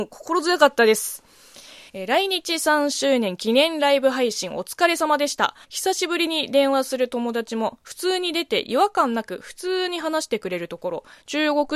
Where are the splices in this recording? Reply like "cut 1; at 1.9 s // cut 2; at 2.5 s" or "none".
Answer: cut 1; at 1.9 s // cut 2; at 5.6 s